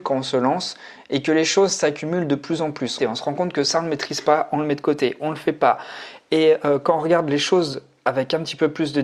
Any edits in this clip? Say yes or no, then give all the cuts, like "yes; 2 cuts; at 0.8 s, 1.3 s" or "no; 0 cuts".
yes; 1 cut; at 3.0 s